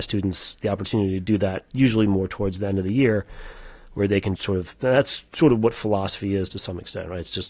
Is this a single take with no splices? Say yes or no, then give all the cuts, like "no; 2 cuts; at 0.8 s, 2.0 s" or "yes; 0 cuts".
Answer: no; 1 cut; at 4.4 s